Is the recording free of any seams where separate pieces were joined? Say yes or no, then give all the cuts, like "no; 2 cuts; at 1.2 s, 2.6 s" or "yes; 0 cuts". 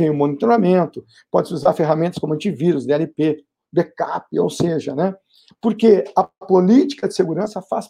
no; 1 cut; at 5.5 s